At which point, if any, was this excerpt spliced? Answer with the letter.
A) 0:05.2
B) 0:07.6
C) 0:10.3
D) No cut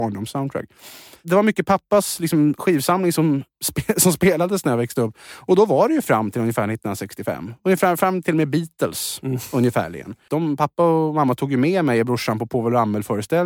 C